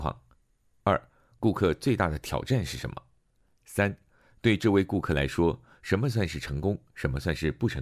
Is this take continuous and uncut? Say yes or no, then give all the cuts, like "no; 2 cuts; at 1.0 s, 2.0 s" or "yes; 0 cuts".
yes; 0 cuts